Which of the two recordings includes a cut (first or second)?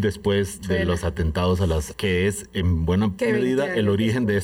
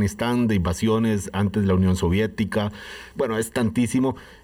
first